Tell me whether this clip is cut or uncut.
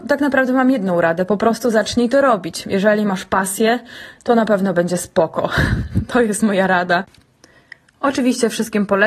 uncut